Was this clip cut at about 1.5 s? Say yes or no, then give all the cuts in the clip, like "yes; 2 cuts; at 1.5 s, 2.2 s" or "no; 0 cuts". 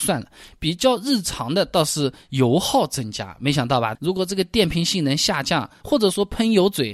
no; 2 cuts; at 4.0 s, 5.8 s